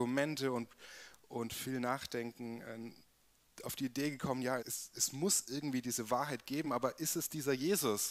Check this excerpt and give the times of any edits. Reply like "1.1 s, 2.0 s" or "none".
4.6 s, 6.6 s